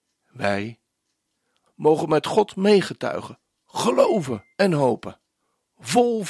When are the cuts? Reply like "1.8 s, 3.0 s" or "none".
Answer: 1.7 s, 4.5 s